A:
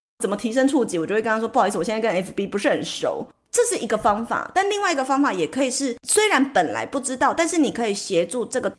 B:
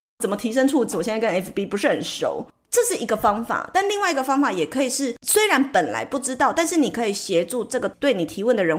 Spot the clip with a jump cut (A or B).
B